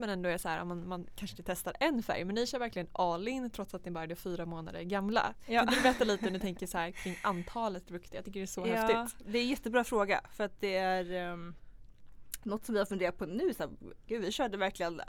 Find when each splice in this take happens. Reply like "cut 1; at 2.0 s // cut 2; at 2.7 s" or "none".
none